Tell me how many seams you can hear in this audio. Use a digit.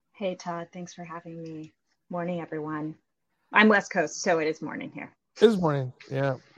0